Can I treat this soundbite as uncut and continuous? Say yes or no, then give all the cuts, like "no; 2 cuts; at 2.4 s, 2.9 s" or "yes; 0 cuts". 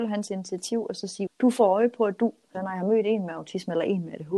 no; 2 cuts; at 1.3 s, 2.5 s